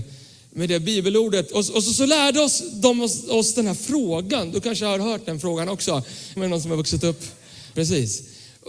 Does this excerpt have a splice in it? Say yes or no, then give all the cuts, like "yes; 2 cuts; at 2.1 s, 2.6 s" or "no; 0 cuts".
yes; 2 cuts; at 6.4 s, 7.7 s